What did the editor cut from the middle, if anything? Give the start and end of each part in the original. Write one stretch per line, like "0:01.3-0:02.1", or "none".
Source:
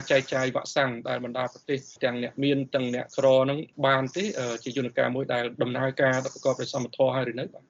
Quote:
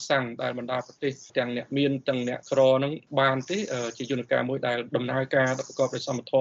none